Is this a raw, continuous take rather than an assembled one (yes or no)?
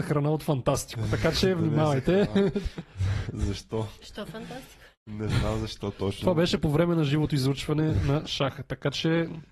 yes